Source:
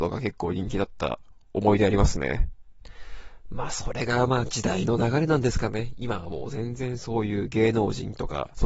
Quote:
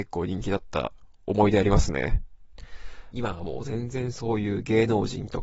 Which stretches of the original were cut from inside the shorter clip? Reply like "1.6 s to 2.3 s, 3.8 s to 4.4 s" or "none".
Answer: 3.4 s to 6.0 s